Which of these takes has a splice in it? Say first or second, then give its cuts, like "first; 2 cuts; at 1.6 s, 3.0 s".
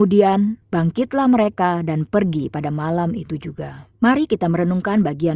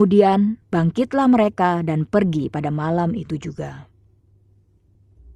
first; 1 cut; at 4.0 s